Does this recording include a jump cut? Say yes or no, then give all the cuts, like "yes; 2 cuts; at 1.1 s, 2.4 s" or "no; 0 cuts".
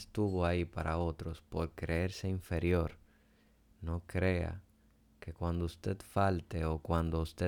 no; 0 cuts